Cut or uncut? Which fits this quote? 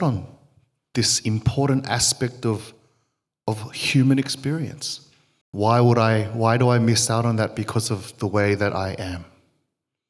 cut